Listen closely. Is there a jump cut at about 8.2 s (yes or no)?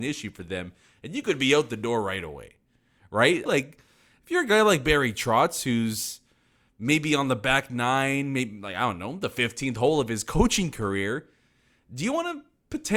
no